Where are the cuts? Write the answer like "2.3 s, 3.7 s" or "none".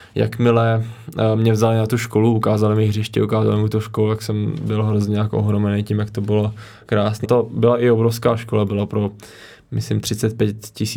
7.2 s